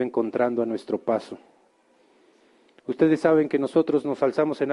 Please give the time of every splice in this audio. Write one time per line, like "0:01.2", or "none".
none